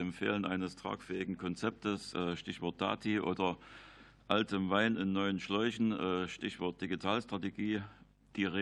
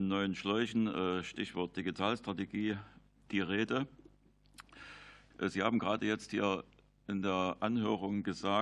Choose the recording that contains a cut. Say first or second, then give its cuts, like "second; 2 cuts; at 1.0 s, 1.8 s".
second; 1 cut; at 5.3 s